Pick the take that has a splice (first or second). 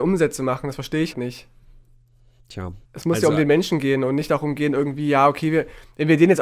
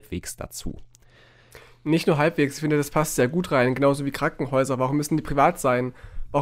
first